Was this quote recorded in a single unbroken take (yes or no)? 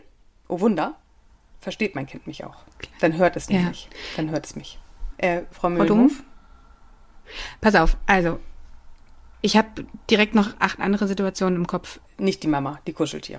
no